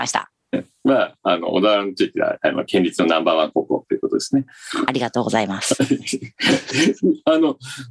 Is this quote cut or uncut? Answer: uncut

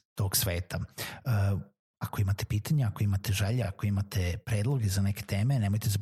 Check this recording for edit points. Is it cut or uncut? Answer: uncut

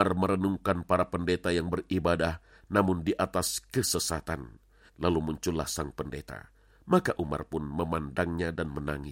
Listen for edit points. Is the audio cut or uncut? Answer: cut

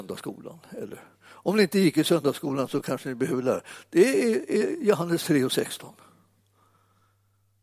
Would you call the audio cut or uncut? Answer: uncut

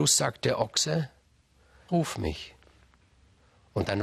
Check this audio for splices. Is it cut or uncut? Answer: cut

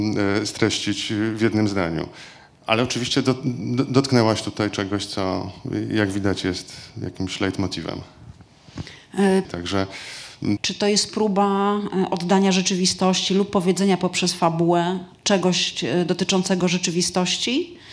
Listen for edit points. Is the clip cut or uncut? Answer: cut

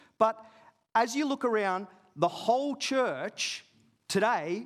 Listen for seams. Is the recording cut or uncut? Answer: uncut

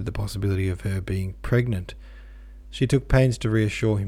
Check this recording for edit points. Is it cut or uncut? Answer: uncut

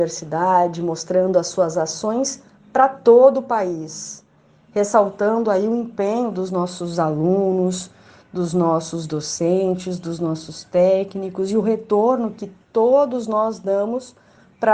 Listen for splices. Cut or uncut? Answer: uncut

